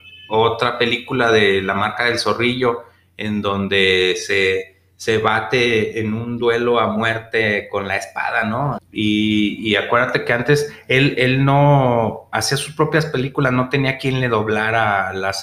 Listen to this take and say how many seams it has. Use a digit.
1